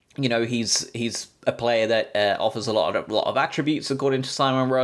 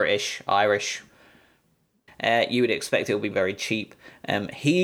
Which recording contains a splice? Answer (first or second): second